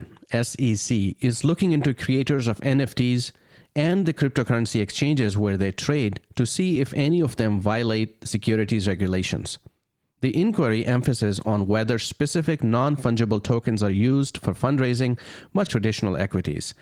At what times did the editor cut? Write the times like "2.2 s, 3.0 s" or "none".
15.7 s